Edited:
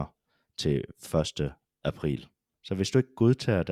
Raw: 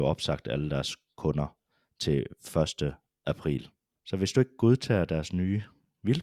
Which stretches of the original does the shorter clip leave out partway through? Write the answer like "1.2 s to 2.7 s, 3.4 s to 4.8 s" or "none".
none